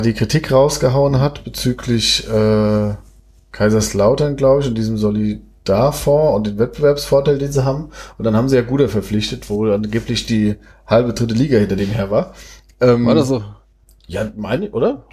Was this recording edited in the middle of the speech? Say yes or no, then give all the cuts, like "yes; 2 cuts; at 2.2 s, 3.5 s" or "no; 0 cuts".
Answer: no; 0 cuts